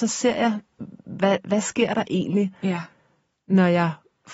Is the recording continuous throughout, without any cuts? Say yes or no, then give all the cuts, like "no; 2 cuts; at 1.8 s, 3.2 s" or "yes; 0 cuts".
yes; 0 cuts